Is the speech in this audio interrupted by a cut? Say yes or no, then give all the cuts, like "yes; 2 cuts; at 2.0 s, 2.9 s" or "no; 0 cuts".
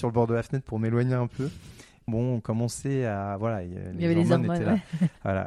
yes; 1 cut; at 2.1 s